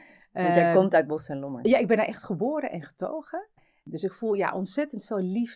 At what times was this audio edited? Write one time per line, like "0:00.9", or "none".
none